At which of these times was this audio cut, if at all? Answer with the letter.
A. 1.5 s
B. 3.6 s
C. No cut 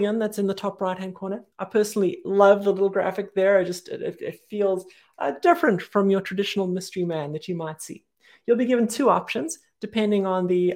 A